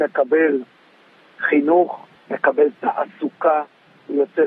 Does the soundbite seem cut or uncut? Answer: uncut